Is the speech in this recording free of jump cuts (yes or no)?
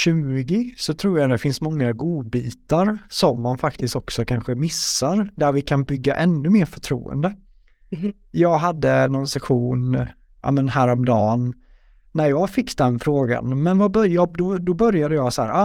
yes